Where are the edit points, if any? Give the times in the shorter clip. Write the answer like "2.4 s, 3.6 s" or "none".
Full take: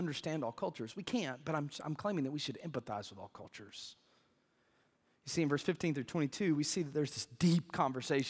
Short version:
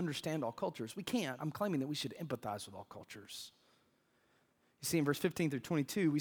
1.4 s